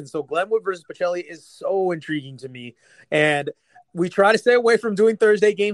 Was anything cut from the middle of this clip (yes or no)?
no